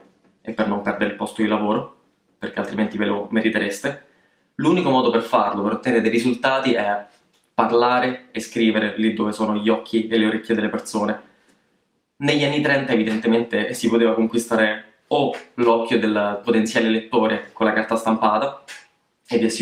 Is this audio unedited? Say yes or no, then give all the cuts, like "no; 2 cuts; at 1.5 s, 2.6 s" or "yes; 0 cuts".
yes; 0 cuts